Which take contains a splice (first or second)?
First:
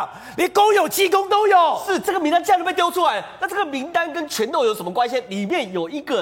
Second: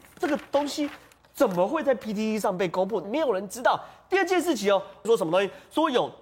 second